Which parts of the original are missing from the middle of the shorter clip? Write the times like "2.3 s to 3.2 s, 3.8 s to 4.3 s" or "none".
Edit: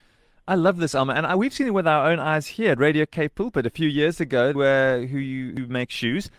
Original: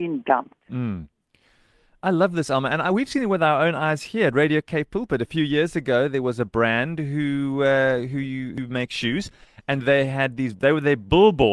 6.1 s to 7.6 s